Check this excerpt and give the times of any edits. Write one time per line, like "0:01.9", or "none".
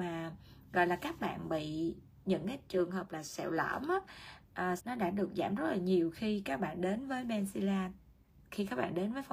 0:04.8

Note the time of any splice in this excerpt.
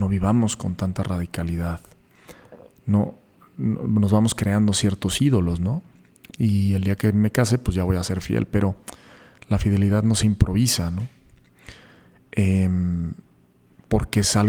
0:06.3

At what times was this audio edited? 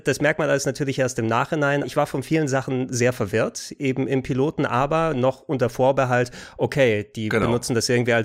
0:01.8

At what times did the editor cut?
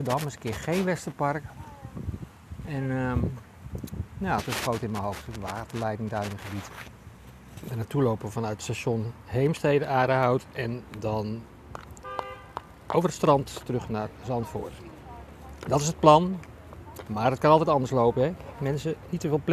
none

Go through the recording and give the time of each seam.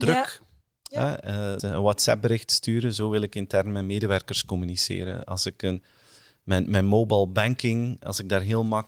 0:01.6

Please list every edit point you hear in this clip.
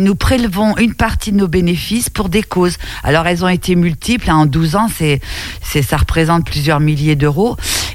none

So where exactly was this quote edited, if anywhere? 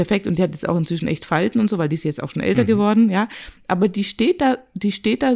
none

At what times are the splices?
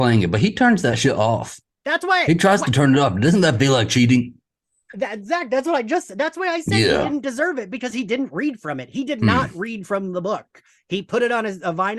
none

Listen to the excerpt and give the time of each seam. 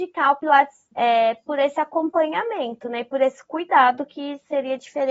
0:00.9

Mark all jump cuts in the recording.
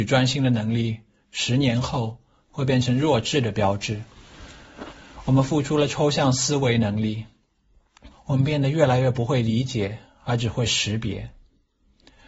0:08.1

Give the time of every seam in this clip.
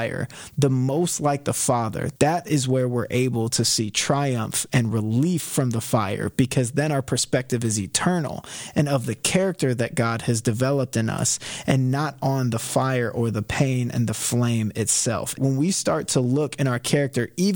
0:02.2
0:15.4

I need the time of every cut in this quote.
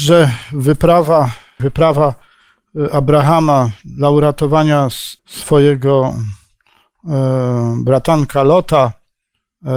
0:01.6
0:05.2

